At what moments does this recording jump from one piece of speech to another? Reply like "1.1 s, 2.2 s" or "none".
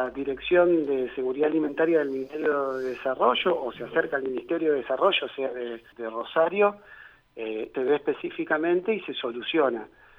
5.9 s, 7.7 s